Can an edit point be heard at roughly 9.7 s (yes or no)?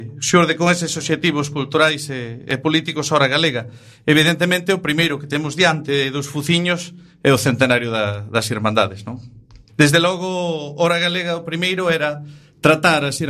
yes